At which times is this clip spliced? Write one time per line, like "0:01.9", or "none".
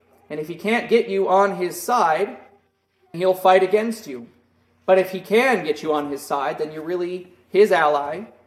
0:03.1